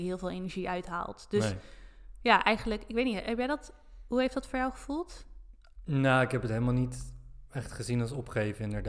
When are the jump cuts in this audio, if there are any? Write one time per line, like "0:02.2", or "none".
none

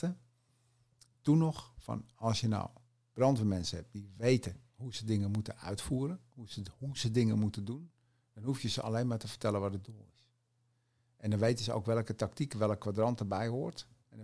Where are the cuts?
none

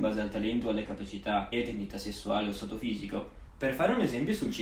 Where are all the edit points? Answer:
0:01.5
0:03.5

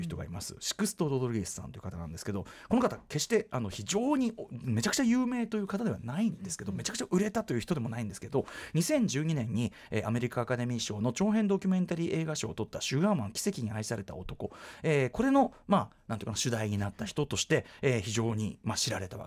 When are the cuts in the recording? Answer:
none

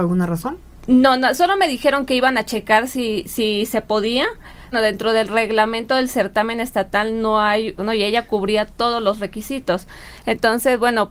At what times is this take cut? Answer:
0:04.7
0:07.8

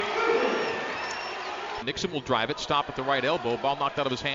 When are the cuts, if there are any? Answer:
0:01.8

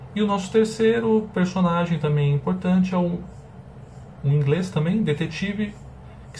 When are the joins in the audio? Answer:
none

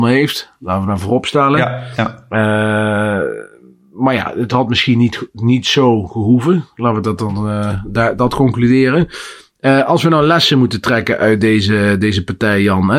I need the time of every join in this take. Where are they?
none

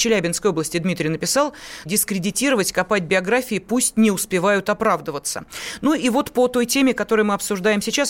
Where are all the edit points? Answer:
0:01.9

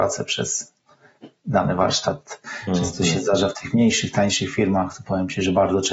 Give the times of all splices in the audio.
none

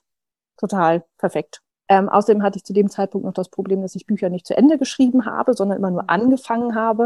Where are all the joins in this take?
0:01.7

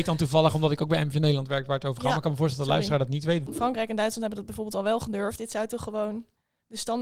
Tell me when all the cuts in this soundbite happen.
0:03.5
0:05.4

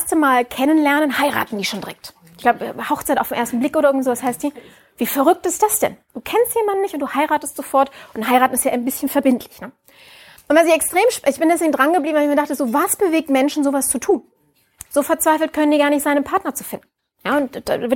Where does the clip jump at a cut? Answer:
none

